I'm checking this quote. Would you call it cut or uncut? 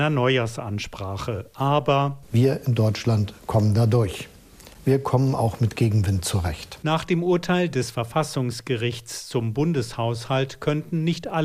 uncut